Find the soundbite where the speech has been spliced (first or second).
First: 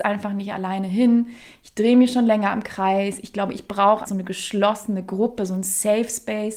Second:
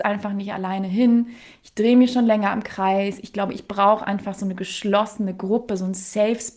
first